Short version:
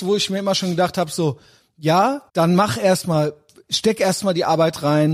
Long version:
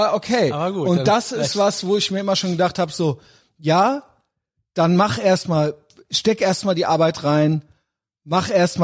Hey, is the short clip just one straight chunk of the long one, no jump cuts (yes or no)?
no